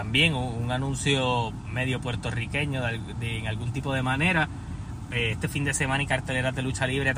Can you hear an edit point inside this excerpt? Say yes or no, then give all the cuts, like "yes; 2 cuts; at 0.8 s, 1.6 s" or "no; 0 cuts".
no; 0 cuts